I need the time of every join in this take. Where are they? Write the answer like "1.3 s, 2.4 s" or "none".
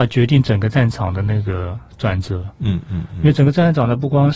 none